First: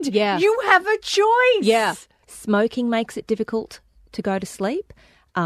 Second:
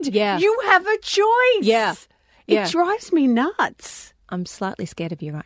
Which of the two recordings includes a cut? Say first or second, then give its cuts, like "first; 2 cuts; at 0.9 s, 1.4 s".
first; 1 cut; at 2.2 s